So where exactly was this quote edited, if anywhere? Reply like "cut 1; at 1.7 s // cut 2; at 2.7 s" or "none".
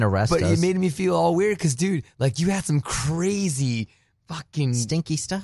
none